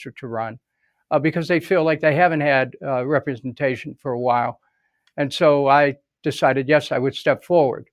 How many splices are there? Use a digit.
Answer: 0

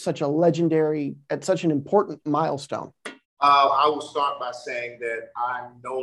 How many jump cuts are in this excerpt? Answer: 1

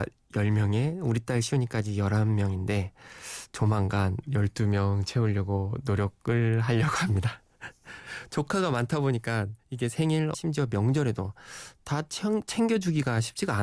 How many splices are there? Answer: 1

